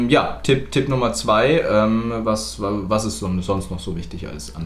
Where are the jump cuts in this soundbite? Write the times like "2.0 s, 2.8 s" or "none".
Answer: none